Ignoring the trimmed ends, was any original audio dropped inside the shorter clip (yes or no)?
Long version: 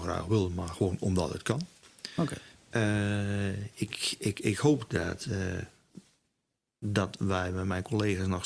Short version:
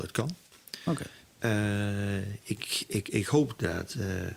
no